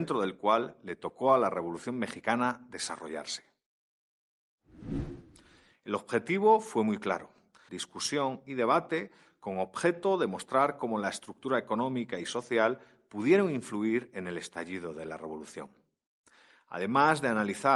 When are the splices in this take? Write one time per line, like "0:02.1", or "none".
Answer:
0:05.7
0:07.7